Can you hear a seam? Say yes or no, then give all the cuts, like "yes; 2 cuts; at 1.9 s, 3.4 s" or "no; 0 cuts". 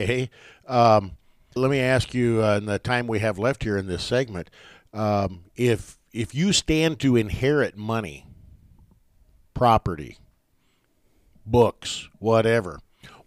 yes; 1 cut; at 1.6 s